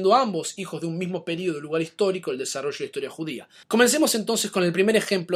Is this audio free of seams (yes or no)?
no